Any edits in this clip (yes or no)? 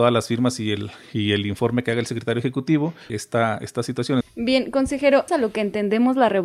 yes